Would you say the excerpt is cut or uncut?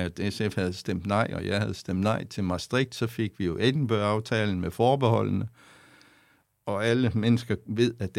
cut